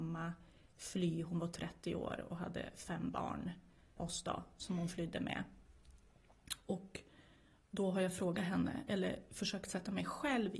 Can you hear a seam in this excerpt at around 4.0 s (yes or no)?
yes